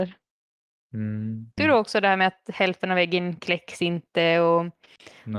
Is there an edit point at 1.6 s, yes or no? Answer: yes